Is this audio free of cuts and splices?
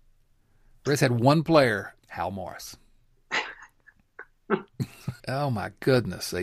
no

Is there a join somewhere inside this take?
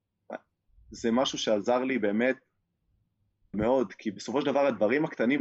yes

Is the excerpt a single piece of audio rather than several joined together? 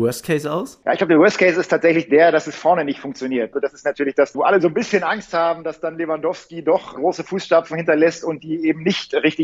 yes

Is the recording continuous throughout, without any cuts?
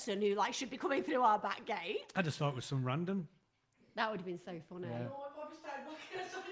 yes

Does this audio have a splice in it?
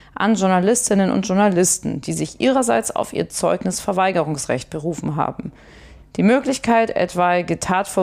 no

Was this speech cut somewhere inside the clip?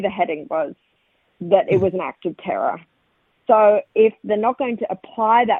no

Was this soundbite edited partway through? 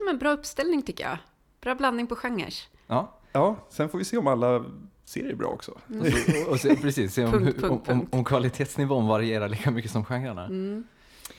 no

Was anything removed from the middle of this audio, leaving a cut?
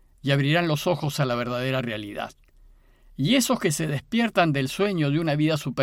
no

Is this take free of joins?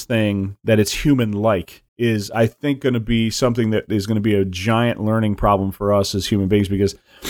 no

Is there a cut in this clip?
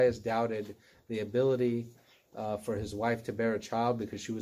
no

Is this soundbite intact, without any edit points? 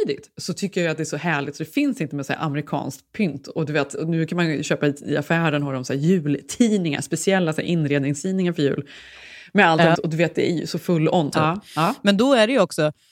no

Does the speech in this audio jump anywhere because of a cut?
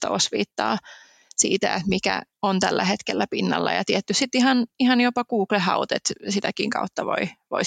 no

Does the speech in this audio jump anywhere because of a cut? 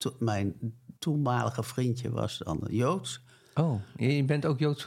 yes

